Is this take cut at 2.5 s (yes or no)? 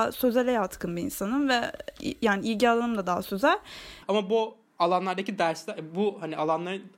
no